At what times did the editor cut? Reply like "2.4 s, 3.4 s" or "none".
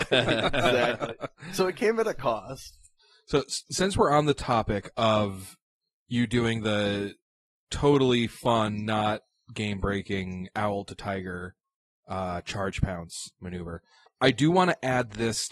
none